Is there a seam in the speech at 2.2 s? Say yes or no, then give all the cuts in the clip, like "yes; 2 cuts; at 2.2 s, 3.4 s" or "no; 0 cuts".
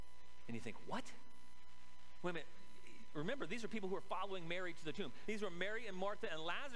no; 1 cut; at 5.3 s